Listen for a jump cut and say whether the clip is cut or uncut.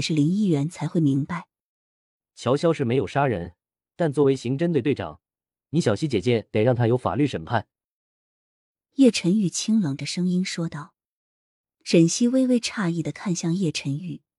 uncut